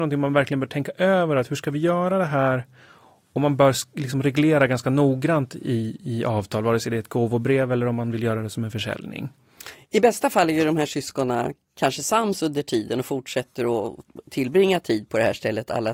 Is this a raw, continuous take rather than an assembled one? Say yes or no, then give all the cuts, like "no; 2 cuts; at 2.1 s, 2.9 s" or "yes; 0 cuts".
yes; 0 cuts